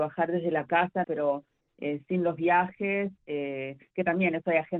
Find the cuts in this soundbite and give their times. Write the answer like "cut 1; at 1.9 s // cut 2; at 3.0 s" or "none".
cut 1; at 1.0 s